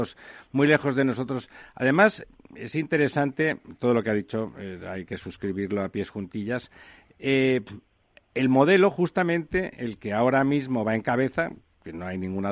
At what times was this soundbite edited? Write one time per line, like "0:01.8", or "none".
none